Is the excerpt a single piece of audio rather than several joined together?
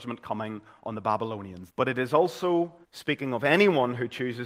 no; 2 cuts; at 1.7 s, 2.8 s

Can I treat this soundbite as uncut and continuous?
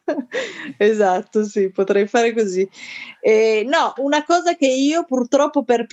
no; 1 cut; at 4.0 s

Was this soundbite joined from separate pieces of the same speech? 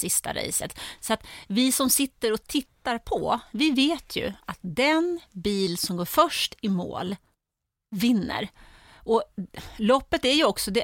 no; 0 cuts

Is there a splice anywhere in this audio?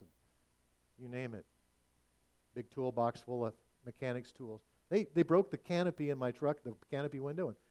no; 0 cuts

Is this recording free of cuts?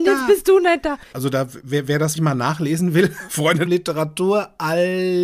no; 3 cuts; at 1.1 s, 2.2 s, 3.7 s

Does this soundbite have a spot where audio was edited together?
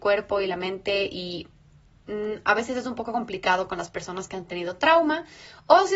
no; 0 cuts

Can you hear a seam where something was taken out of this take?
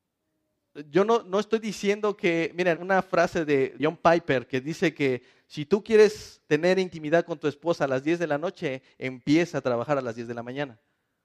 yes; 2 cuts; at 2.8 s, 3.8 s

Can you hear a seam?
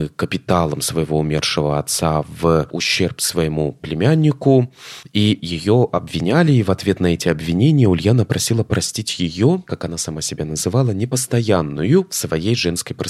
no; 0 cuts

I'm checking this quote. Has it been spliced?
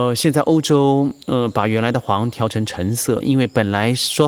yes; 1 cut; at 3.2 s

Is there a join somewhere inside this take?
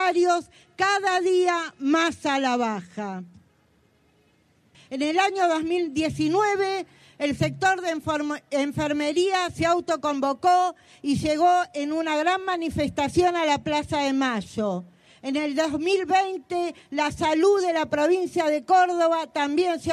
yes; 1 cut; at 4.7 s

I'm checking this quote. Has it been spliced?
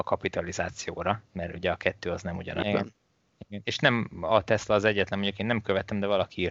yes; 2 cuts; at 1.3 s, 2.6 s

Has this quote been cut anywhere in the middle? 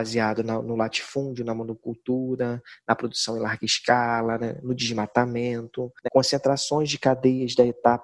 yes; 1 cut; at 6.0 s

